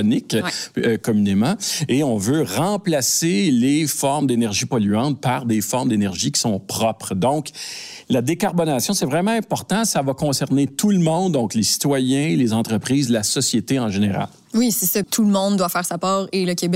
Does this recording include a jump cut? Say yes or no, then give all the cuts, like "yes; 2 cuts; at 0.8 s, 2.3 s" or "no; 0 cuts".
yes; 1 cut; at 15.0 s